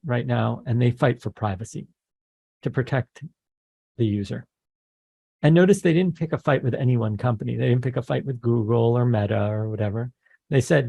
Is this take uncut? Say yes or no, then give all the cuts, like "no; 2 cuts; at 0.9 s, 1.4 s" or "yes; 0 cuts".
yes; 0 cuts